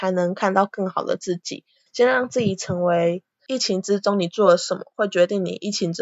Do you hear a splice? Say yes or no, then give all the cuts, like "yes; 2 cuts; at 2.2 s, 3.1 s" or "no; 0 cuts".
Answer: yes; 2 cuts; at 1.9 s, 3.4 s